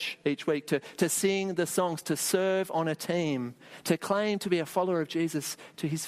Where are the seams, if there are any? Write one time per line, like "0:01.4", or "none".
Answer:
none